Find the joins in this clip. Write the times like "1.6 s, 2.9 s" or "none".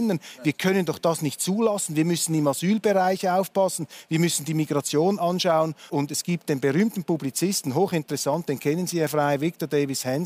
5.9 s